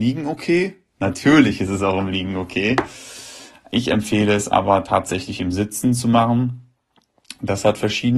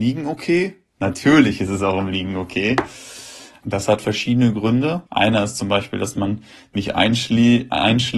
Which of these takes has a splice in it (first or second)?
second